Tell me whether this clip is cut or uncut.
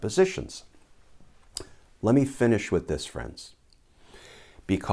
uncut